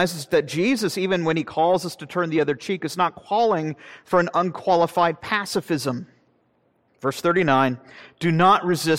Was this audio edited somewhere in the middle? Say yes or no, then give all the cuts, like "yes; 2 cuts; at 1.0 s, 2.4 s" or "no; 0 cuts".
yes; 1 cut; at 6.9 s